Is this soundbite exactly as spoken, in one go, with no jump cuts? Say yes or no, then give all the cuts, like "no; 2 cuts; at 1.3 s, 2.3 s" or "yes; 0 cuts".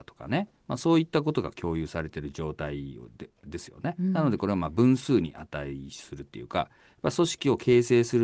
yes; 0 cuts